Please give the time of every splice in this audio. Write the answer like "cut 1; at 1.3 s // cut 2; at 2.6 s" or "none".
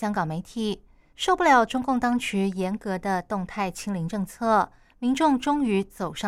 cut 1; at 1.1 s